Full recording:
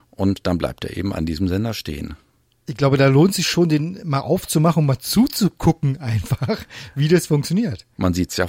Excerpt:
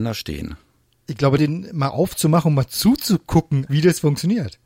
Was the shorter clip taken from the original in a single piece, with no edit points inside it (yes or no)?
no